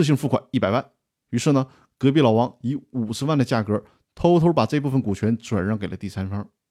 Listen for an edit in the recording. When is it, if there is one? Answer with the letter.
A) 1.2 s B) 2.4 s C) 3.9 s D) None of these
A